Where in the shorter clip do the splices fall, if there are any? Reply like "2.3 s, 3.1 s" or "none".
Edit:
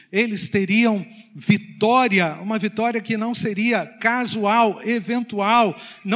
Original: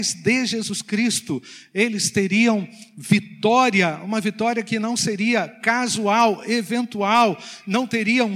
none